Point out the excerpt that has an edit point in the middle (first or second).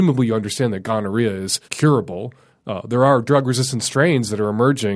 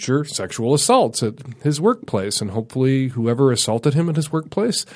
first